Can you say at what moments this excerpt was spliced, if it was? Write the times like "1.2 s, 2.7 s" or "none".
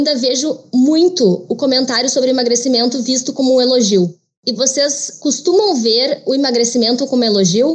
4.4 s